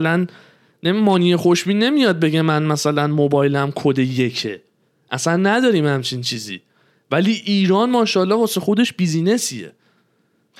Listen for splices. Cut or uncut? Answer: uncut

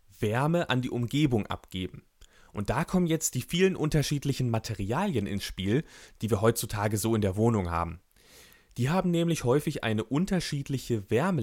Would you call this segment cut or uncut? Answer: uncut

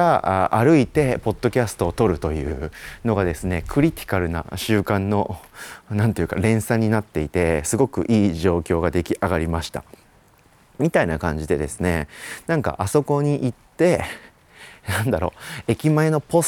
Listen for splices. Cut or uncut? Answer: uncut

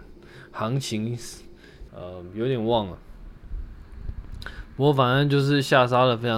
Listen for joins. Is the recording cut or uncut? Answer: cut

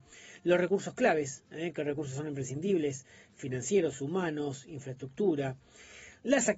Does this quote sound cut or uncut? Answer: uncut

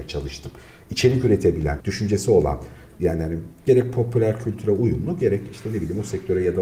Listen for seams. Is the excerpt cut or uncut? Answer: cut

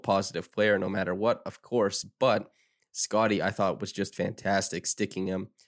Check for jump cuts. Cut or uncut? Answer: uncut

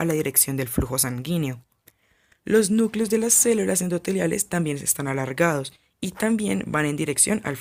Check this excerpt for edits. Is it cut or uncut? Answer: uncut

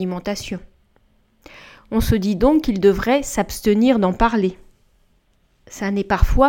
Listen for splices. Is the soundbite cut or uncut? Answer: uncut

